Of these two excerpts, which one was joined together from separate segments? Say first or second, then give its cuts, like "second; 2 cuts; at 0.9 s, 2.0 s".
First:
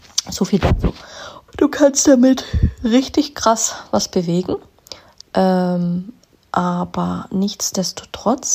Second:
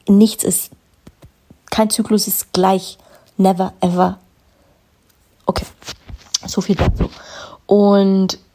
first; 1 cut; at 1.5 s